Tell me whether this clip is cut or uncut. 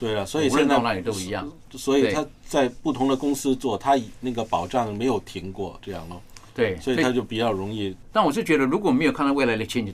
cut